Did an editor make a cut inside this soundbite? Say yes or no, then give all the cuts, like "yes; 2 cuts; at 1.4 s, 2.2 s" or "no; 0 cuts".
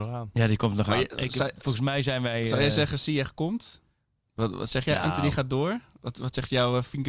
no; 0 cuts